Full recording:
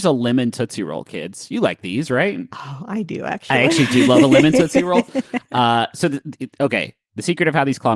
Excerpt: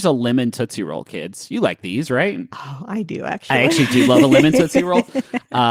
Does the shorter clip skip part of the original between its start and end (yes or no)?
no